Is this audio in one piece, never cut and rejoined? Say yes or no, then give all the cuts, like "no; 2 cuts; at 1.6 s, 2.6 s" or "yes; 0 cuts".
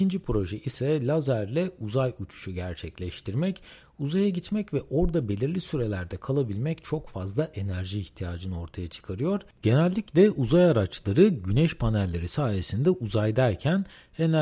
yes; 0 cuts